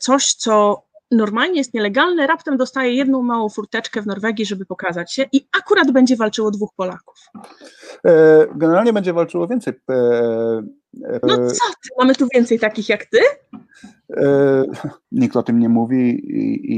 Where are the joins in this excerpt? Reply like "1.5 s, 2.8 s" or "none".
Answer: 11.2 s, 15.0 s